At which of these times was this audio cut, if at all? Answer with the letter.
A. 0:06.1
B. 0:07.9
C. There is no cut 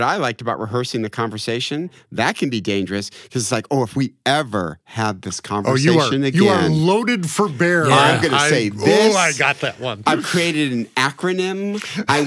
C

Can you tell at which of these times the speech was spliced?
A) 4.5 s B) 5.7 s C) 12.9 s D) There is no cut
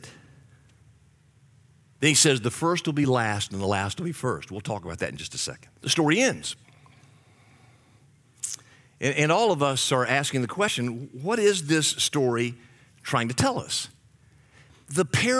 B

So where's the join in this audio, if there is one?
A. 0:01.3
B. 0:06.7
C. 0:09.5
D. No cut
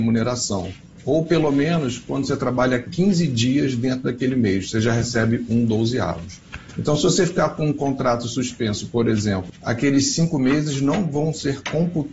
C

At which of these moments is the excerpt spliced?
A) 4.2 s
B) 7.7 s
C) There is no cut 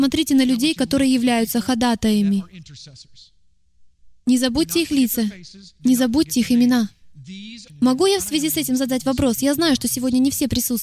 B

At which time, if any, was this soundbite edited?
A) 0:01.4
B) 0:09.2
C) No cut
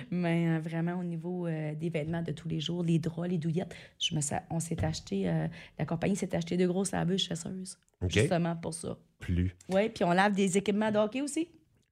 B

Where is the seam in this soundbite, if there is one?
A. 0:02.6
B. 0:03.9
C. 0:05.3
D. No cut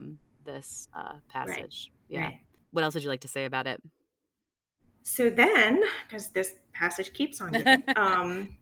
D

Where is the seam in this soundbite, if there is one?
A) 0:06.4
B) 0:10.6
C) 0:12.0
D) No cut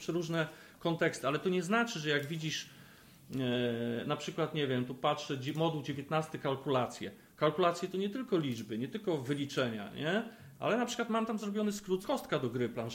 C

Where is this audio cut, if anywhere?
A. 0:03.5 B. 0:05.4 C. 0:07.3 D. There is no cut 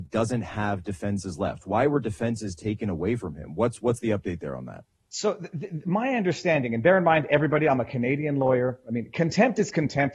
D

